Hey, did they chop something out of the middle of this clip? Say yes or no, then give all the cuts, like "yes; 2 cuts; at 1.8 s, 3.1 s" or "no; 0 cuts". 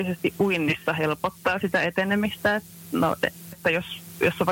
yes; 1 cut; at 3.5 s